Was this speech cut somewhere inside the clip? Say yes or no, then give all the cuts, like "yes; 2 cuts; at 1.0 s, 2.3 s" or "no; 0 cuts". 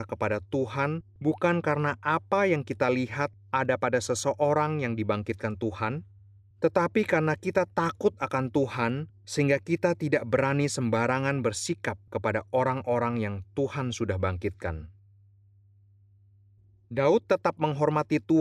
no; 0 cuts